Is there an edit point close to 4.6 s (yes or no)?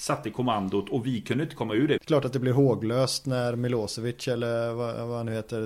no